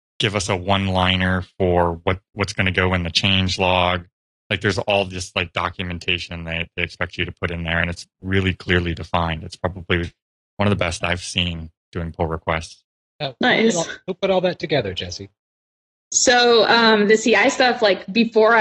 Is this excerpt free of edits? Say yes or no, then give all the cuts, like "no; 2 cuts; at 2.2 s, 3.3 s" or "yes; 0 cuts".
yes; 0 cuts